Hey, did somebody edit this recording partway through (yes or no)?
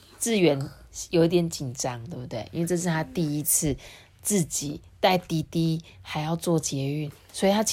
no